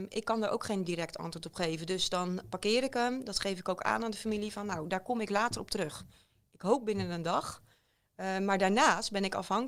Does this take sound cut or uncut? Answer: uncut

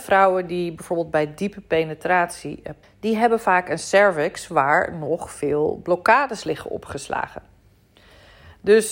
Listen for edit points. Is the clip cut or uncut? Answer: cut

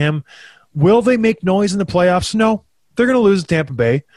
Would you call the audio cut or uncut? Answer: uncut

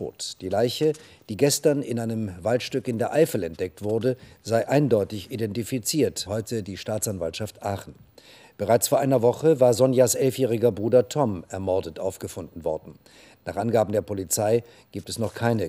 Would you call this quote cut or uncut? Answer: cut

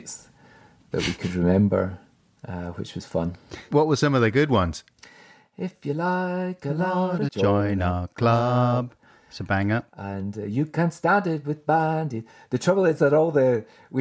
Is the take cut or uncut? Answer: cut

